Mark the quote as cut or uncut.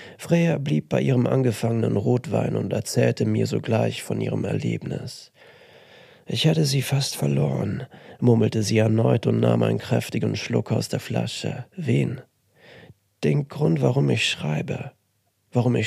cut